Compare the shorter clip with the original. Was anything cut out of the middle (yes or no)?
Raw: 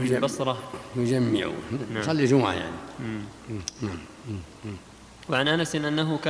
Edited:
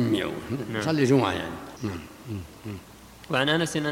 yes